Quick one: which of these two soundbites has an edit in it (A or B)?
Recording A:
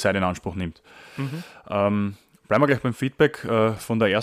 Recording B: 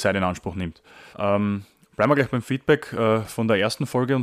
B